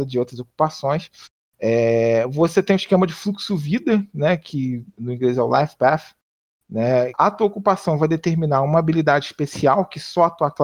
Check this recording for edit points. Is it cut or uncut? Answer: cut